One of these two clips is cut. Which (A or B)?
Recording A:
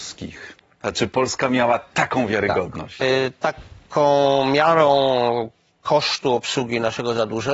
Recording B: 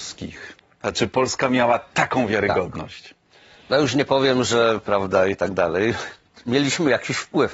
A